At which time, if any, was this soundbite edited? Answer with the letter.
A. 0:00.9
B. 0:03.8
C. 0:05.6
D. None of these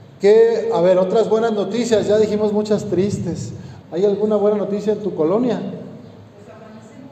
B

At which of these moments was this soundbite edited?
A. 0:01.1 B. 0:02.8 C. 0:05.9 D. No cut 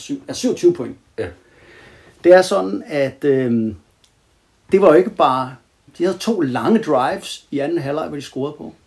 C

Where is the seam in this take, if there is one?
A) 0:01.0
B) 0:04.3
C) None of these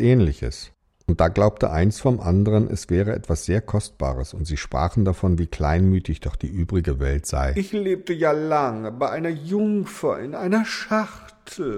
C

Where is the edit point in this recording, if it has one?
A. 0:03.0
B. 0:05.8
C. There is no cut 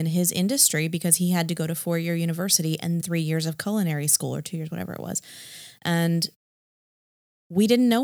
A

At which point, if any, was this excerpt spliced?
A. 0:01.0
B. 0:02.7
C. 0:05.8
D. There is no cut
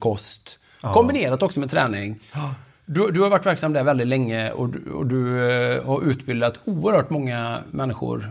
D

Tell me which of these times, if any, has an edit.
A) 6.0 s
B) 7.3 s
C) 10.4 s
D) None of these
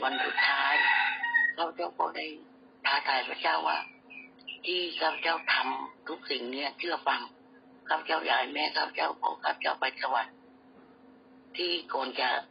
A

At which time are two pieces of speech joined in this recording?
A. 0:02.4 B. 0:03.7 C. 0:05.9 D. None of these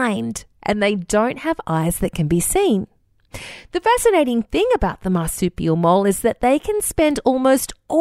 D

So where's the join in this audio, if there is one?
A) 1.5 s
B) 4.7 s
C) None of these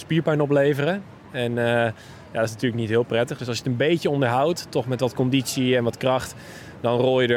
C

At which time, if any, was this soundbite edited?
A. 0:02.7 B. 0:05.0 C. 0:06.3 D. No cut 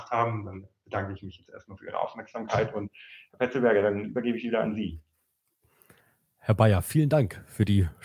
D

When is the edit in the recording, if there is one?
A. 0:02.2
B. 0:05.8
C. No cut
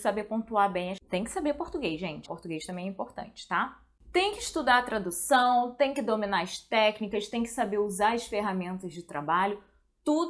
A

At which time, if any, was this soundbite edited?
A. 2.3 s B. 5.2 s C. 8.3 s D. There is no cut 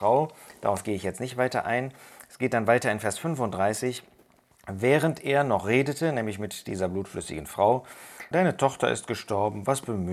C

